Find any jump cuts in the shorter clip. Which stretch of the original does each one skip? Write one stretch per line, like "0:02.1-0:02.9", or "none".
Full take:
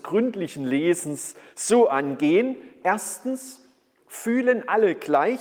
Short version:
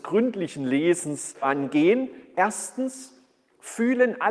0:01.4-0:01.9